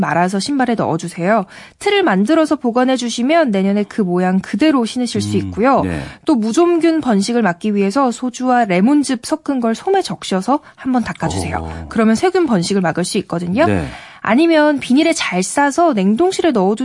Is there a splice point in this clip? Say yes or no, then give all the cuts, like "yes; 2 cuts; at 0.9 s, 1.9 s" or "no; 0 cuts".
no; 0 cuts